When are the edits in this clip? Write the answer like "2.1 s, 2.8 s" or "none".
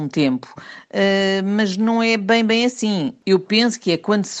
none